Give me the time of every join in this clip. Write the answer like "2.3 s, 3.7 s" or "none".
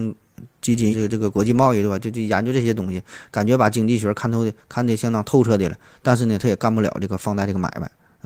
0.9 s

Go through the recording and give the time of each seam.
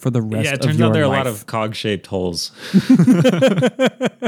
none

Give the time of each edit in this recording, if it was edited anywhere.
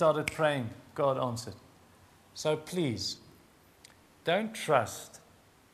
2.2 s

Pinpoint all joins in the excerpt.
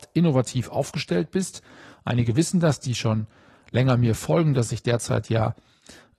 none

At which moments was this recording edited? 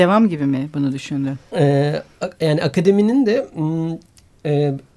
1.5 s

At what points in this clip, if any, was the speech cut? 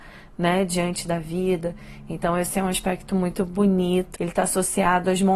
4.2 s

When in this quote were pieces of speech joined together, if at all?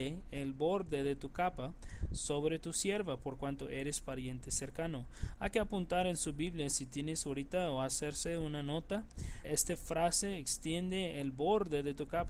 9.4 s

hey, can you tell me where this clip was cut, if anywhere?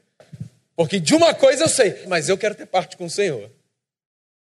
2.1 s

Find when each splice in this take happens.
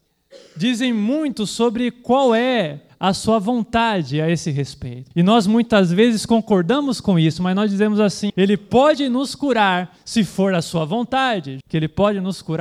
5.1 s, 8.3 s, 11.6 s

